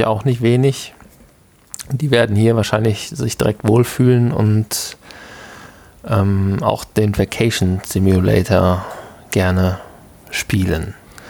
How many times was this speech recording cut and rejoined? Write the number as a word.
zero